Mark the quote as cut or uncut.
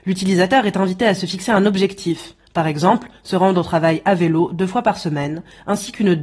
uncut